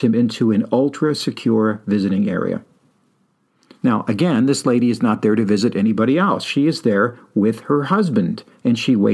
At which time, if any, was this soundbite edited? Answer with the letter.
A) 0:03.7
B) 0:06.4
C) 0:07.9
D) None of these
D